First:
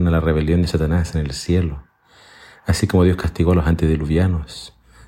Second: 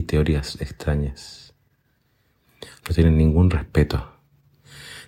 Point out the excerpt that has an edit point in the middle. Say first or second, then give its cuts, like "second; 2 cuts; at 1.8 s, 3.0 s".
second; 1 cut; at 2.8 s